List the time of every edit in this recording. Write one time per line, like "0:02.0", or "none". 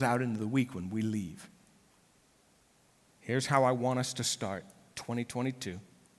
0:03.1